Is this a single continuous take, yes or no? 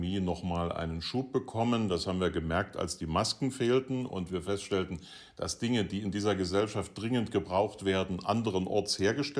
yes